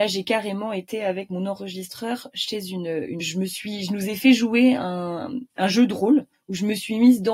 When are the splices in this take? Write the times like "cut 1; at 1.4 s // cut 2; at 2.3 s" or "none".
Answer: cut 1; at 3.2 s